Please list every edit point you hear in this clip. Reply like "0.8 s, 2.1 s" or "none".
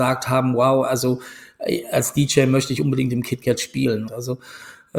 4.1 s